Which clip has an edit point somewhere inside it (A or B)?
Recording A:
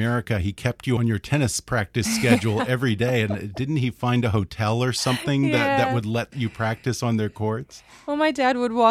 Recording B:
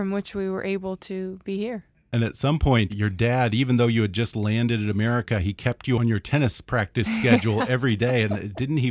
B